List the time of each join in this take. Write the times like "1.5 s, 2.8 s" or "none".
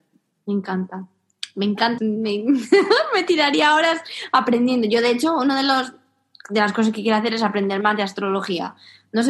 2.0 s